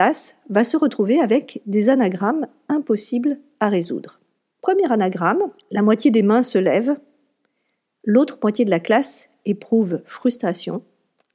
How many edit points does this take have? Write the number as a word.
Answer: zero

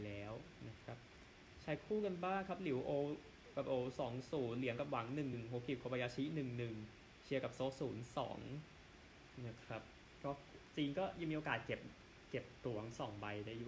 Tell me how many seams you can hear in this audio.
one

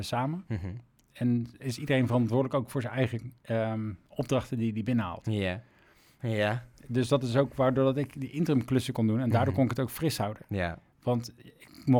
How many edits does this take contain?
two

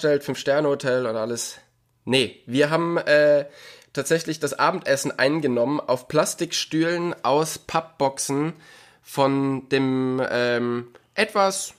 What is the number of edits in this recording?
zero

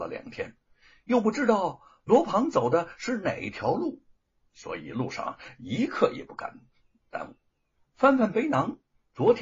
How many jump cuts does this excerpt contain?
two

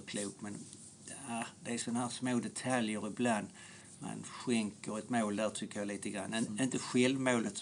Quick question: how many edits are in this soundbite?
zero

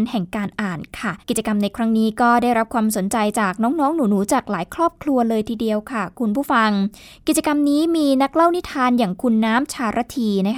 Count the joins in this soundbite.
one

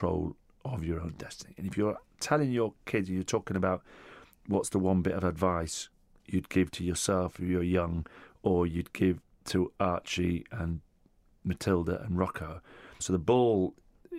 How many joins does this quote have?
one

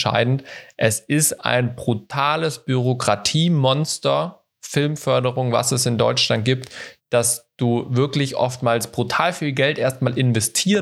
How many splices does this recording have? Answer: zero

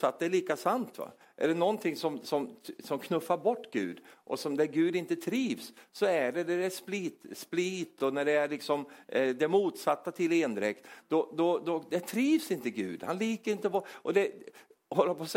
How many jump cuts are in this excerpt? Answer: zero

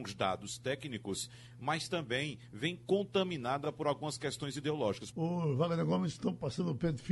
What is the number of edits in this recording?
one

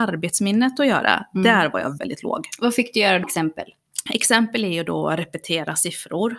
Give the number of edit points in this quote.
two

